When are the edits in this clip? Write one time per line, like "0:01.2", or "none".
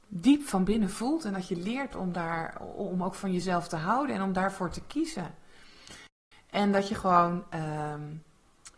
0:06.3